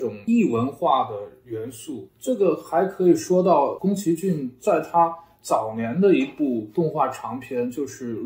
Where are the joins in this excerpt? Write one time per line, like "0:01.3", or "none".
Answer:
none